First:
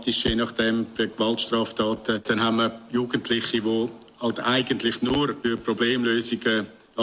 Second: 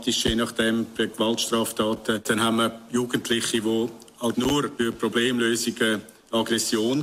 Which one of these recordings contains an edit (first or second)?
second